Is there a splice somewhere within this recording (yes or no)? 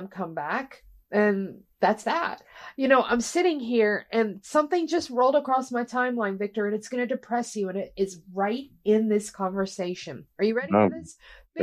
no